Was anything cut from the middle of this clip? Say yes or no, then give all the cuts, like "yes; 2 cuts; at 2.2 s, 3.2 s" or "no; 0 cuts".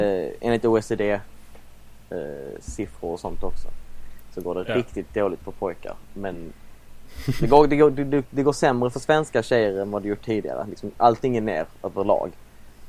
no; 0 cuts